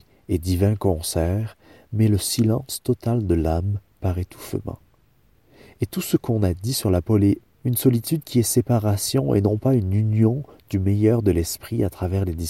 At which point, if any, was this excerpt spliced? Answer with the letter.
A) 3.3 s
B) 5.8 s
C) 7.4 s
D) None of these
C